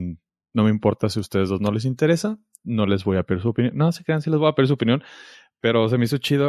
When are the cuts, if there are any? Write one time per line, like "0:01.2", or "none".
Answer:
none